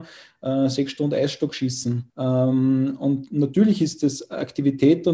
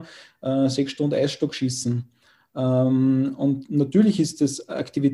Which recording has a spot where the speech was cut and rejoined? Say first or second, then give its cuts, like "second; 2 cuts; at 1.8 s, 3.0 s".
first; 1 cut; at 2.1 s